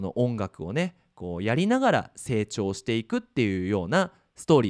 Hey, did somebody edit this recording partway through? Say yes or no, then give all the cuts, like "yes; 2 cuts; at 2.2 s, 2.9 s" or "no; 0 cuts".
no; 0 cuts